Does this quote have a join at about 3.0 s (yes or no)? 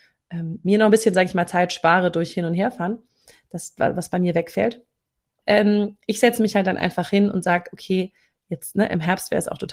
no